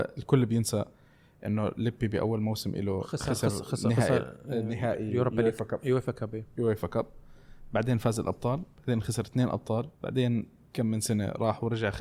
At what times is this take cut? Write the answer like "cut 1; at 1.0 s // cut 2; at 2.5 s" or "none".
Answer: cut 1; at 10.0 s